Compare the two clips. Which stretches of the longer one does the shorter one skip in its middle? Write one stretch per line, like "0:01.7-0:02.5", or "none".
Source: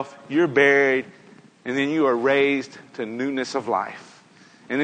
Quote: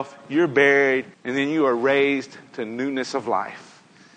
0:01.1-0:01.5